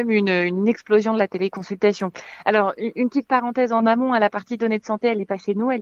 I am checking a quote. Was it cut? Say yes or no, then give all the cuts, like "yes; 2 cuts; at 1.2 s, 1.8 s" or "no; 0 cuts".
no; 0 cuts